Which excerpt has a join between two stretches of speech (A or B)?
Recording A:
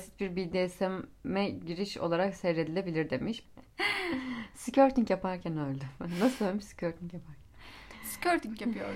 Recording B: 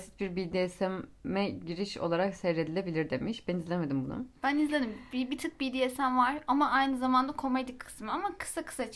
A